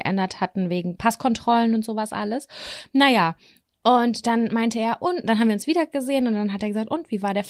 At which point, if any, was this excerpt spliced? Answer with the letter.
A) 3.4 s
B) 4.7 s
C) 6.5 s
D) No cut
D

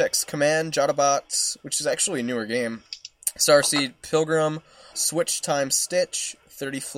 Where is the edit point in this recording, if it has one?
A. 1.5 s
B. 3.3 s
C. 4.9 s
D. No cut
C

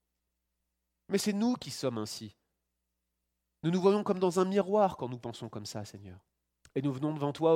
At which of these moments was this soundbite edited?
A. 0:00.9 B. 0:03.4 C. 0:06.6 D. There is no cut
C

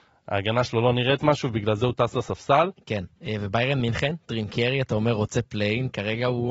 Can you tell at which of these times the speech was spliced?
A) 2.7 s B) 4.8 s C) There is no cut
A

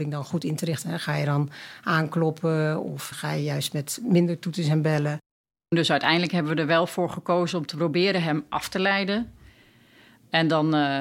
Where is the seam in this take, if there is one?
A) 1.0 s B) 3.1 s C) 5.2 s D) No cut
B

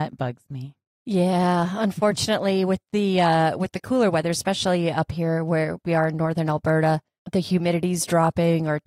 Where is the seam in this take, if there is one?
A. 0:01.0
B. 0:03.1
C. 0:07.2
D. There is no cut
C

